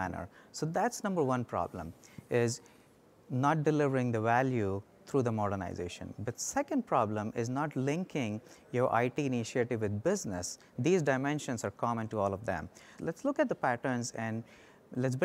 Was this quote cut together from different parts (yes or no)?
yes